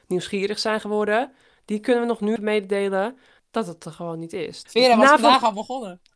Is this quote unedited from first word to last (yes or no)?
no